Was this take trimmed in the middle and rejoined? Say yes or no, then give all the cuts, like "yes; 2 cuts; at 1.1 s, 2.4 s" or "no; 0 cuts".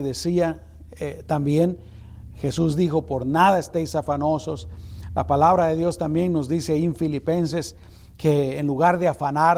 no; 0 cuts